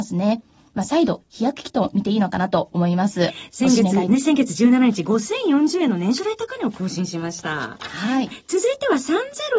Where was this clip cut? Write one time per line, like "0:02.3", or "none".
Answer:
0:04.1
0:08.3